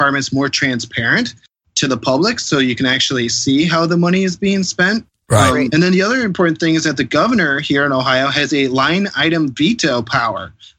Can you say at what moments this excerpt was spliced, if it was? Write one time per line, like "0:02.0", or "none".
0:05.7